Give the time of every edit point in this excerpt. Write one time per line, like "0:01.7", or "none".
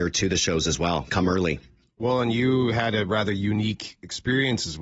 none